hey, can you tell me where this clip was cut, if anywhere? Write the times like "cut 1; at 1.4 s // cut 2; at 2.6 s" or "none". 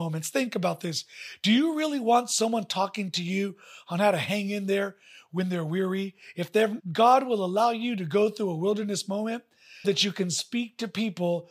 cut 1; at 6.8 s // cut 2; at 9.8 s